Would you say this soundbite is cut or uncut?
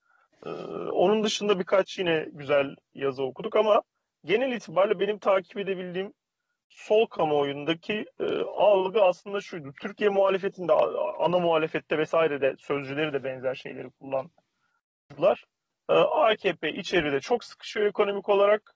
uncut